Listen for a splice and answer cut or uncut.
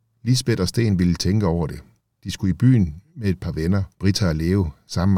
uncut